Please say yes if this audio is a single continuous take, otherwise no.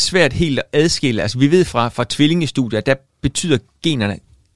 yes